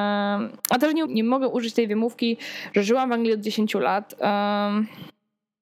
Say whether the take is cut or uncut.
cut